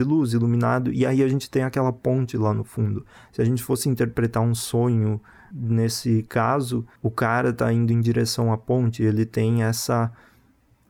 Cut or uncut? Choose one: cut